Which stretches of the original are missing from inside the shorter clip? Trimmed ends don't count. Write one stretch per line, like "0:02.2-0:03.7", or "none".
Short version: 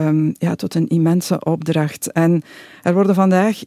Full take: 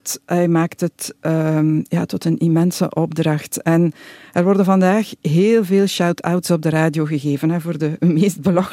none

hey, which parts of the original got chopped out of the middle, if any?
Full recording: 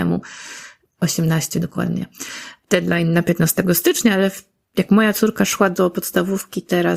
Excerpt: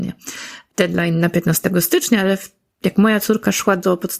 none

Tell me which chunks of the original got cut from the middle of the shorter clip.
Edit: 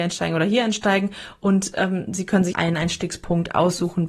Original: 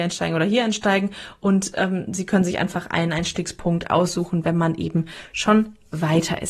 0:02.5-0:02.9

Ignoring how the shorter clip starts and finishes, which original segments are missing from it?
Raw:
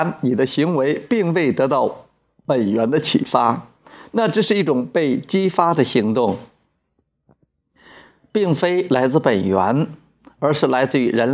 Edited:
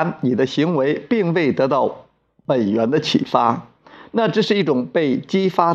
none

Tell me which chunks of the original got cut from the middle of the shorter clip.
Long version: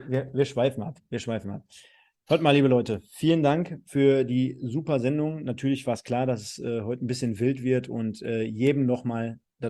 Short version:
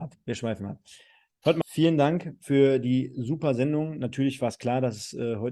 0:02.5-0:03.1

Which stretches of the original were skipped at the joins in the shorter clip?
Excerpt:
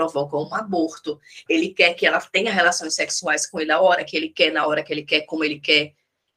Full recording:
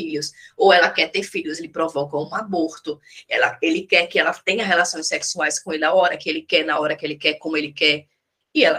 0:03.3-0:03.6

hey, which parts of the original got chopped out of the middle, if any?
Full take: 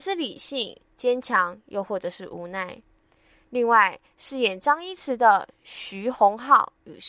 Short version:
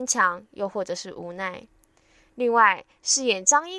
none

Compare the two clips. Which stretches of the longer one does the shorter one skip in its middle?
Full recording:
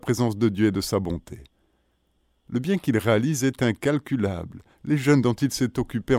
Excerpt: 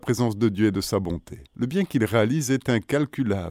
0:01.5-0:02.4

